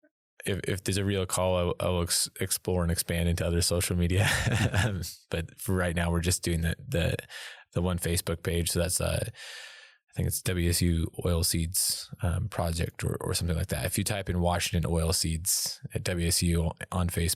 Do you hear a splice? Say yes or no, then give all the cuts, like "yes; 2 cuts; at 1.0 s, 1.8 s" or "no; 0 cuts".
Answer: no; 0 cuts